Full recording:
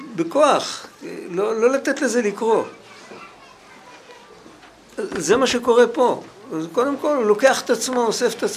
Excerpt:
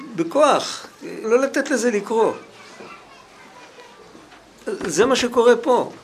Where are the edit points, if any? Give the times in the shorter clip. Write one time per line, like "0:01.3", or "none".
0:01.2